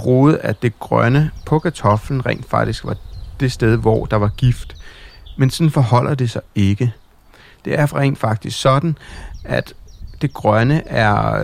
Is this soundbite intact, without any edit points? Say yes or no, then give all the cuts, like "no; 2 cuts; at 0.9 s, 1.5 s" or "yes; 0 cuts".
yes; 0 cuts